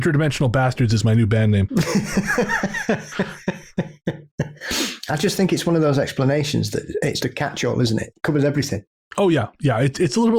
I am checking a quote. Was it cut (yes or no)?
yes